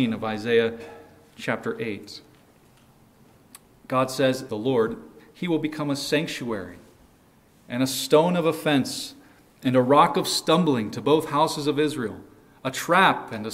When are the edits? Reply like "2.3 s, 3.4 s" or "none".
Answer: 4.5 s